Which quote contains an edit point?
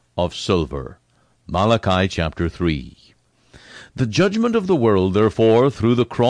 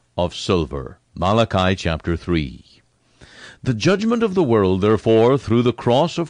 second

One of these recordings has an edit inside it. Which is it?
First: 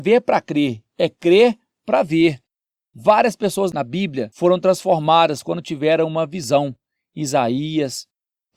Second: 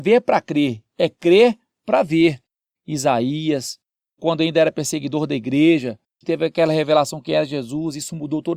second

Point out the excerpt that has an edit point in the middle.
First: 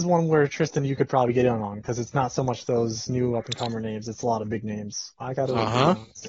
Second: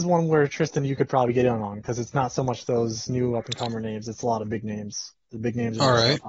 first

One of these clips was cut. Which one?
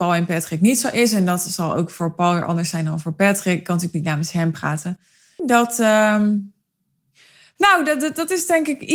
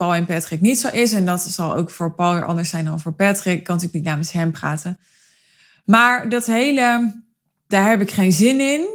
first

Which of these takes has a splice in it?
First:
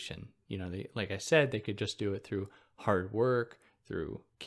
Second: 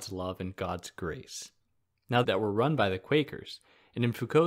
second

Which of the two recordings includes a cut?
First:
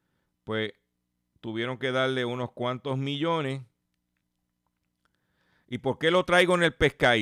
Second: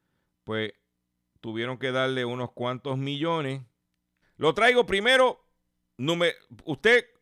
second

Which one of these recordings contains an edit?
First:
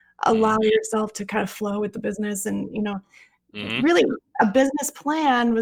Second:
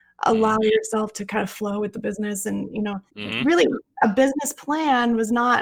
second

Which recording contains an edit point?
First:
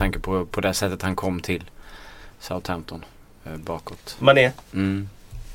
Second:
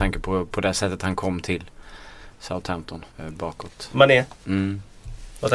second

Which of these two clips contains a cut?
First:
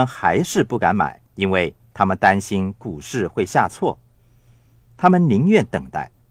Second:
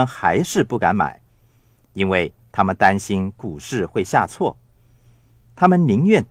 first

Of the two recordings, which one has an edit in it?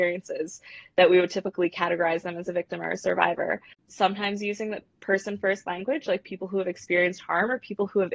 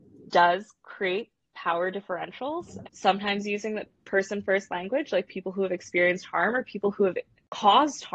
second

